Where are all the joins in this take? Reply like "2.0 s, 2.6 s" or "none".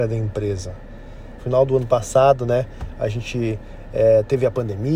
1.4 s